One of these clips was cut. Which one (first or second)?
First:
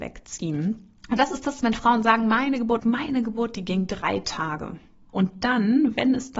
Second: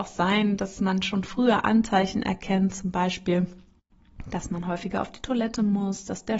first